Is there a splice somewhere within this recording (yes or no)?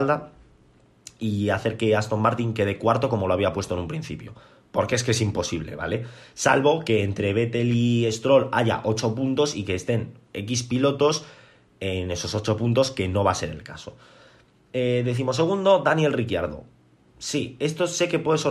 no